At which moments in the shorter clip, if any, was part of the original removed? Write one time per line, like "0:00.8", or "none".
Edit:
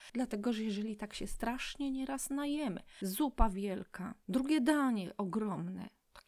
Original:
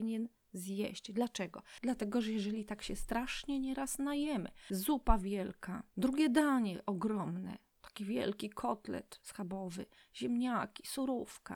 none